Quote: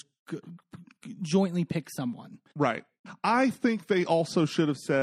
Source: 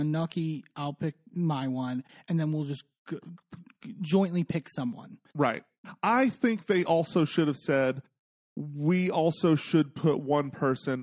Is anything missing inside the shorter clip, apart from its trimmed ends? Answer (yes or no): no